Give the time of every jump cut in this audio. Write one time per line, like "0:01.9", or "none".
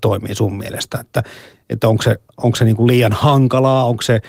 none